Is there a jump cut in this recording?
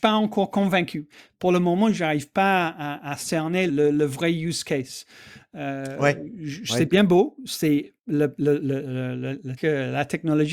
yes; 2 cuts; at 3.7 s, 9.6 s

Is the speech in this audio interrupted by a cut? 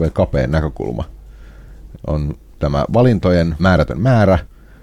yes; 2 cuts; at 1.9 s, 3.6 s

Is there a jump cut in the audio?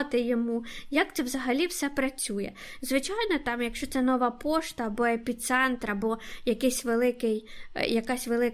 no; 0 cuts

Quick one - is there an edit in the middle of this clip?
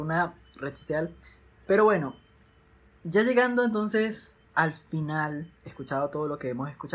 yes; 2 cuts; at 4.4 s, 5.6 s

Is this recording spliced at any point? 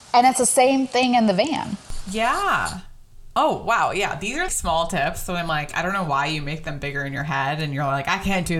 yes; 1 cut; at 4.5 s

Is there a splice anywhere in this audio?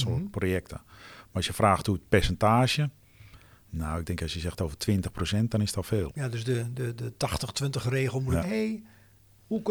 yes; 2 cuts; at 6.1 s, 8.4 s

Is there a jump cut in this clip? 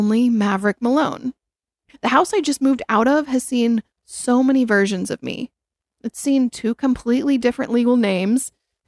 no; 0 cuts

